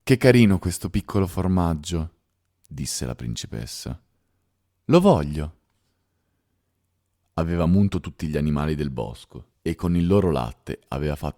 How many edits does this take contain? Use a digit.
2